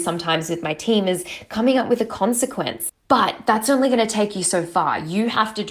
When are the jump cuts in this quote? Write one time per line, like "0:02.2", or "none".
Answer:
0:02.9